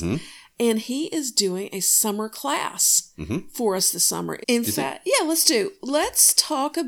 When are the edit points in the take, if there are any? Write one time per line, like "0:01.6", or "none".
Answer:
0:04.4